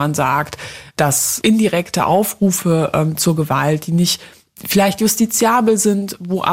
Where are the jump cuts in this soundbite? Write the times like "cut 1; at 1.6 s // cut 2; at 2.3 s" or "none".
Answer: none